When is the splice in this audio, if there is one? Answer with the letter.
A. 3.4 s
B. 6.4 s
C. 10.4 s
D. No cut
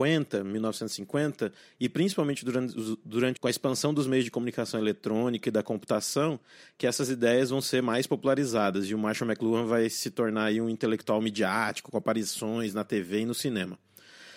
A